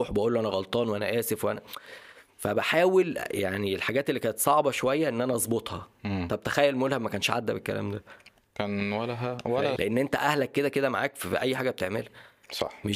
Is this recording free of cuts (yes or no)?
no